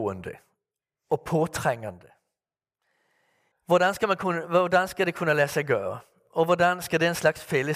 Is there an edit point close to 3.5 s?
yes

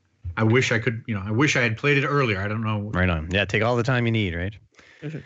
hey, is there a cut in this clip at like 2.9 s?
yes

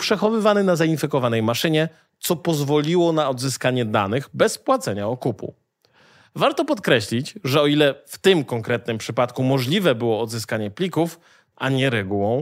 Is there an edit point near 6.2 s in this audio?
no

